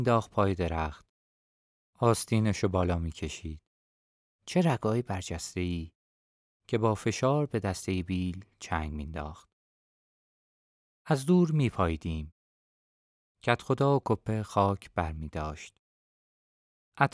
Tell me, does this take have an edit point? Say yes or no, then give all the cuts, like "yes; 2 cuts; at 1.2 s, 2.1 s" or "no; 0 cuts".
yes; 1 cut; at 14.0 s